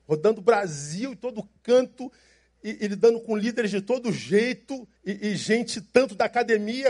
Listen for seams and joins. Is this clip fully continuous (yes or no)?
no